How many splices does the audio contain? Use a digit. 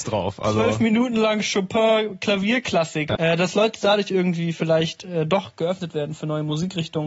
1